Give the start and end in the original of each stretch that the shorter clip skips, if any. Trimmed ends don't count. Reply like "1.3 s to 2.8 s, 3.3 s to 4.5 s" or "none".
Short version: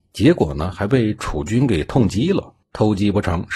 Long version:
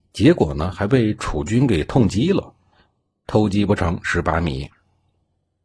2.6 s to 3.2 s